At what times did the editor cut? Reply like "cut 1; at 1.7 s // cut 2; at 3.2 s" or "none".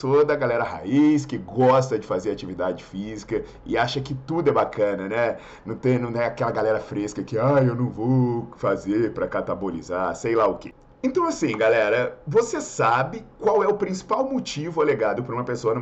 none